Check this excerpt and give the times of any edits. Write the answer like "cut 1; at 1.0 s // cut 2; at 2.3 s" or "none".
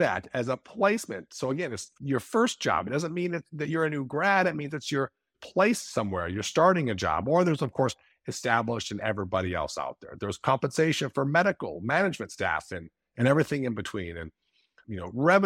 none